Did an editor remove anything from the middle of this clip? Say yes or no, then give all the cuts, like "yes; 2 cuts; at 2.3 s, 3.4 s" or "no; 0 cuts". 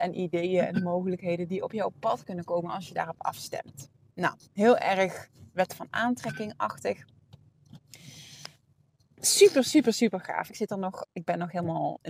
yes; 2 cuts; at 4.5 s, 10.5 s